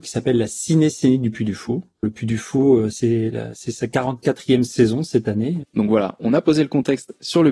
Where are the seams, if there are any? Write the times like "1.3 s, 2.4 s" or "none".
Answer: 2.0 s, 5.6 s